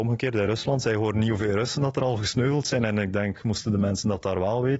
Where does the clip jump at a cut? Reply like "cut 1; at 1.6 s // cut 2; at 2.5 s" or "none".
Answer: none